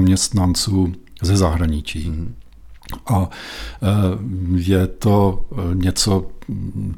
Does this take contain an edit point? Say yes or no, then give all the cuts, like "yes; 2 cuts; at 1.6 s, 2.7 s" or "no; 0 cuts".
no; 0 cuts